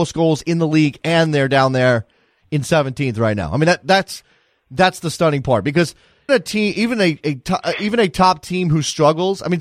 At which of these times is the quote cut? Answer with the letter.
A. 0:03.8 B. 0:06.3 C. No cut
B